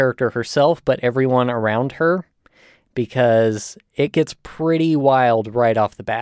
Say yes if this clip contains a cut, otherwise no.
no